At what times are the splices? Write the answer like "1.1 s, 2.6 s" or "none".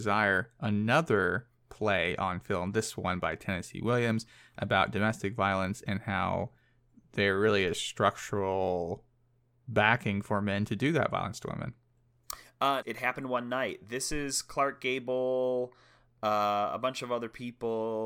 12.8 s

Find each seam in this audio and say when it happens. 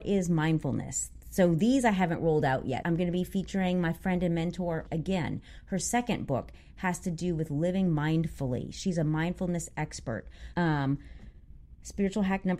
2.8 s, 4.9 s, 10.5 s

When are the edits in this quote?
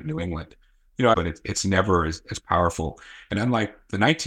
1.1 s

